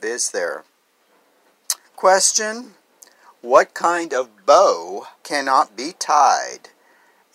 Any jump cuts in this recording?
yes; 2 cuts; at 1.8 s, 5.2 s

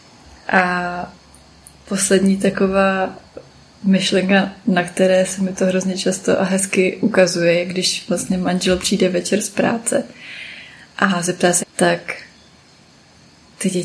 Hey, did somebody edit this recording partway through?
yes; 1 cut; at 11.6 s

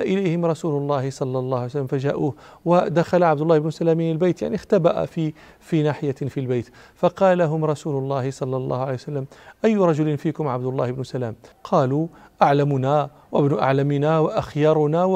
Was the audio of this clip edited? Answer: no; 0 cuts

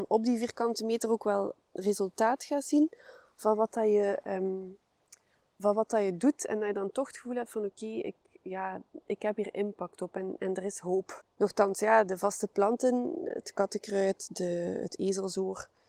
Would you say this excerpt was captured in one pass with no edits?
no; 1 cut; at 11.2 s

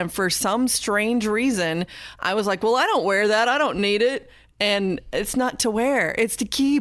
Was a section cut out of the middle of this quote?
no; 0 cuts

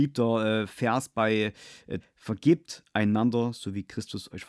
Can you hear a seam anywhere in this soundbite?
yes; 1 cut; at 2.0 s

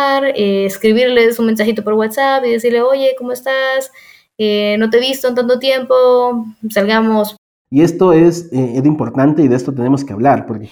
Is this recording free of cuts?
yes; 0 cuts

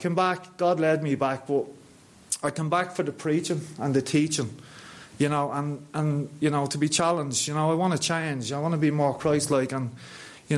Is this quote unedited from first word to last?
yes; 0 cuts

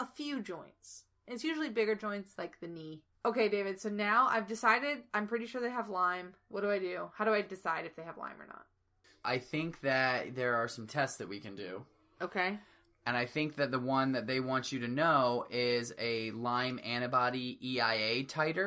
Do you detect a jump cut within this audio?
no; 0 cuts

